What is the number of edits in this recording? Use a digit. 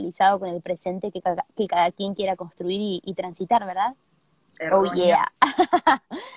1